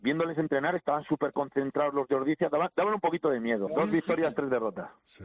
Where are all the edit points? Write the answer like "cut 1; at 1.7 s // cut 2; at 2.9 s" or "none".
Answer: cut 1; at 3.7 s